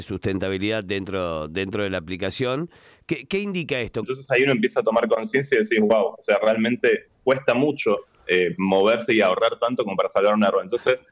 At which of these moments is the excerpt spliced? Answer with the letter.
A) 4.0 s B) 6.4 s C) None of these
A